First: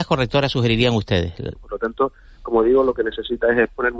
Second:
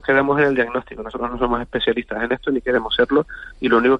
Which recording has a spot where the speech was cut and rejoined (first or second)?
first